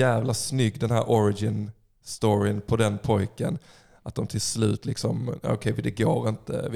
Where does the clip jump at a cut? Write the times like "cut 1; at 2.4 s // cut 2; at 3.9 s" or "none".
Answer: none